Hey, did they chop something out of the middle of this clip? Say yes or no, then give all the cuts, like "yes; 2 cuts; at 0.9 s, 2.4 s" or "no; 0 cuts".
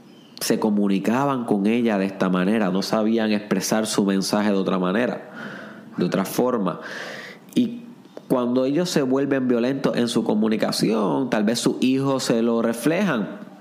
yes; 1 cut; at 2.7 s